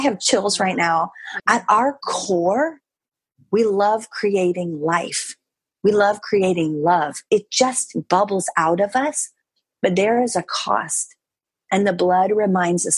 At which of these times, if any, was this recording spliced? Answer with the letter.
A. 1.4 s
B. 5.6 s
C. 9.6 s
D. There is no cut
A